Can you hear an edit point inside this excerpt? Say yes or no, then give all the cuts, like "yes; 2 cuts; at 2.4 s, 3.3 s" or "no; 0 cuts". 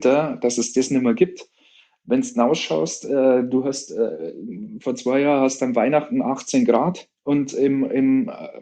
yes; 1 cut; at 7.2 s